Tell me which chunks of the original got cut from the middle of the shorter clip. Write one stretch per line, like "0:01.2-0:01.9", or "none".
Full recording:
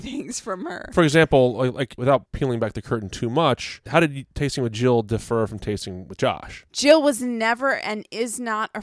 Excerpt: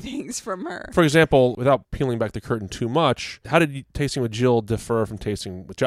0:01.5-0:02.0